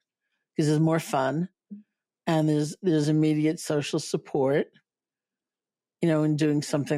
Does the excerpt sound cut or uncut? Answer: uncut